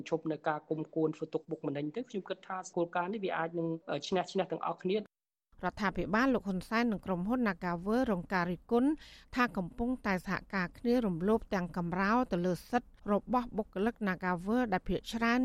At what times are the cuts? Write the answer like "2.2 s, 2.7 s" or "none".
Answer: 13.0 s